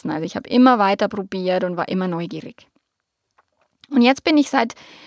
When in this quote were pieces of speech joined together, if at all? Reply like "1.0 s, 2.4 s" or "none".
none